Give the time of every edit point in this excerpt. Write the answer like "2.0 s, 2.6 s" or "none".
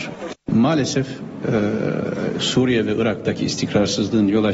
none

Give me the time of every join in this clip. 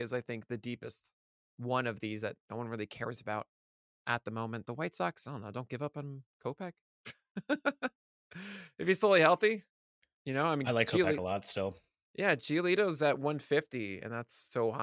none

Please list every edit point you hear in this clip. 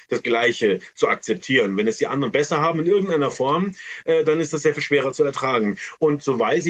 none

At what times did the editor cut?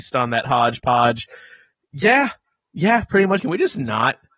3.4 s

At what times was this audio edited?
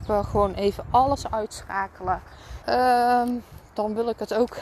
2.6 s

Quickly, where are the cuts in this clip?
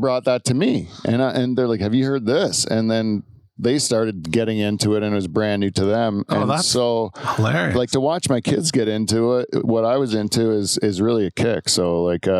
none

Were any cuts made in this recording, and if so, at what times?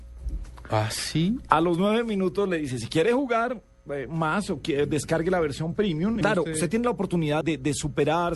6.2 s, 7.4 s

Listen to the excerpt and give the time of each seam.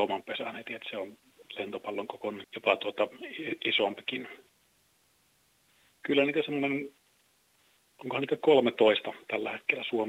2.4 s

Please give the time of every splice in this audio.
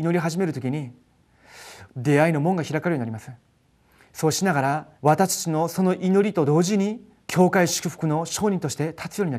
1.9 s, 5.0 s, 7.2 s

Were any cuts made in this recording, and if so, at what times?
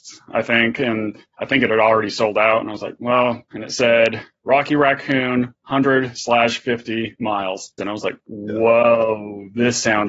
3.5 s, 7.8 s

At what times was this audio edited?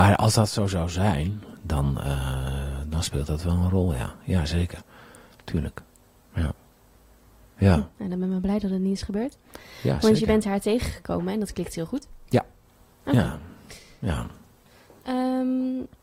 none

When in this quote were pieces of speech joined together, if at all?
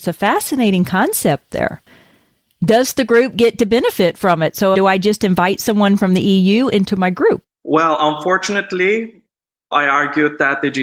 4.7 s, 7.5 s, 9.7 s

